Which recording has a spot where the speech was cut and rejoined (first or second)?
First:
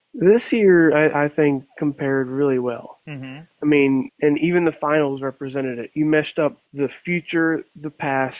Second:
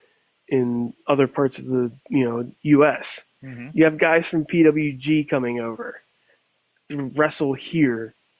first